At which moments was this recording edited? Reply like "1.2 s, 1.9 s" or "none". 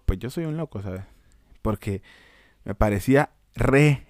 none